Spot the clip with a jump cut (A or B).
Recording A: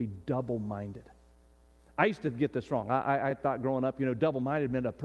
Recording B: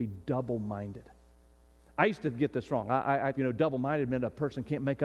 B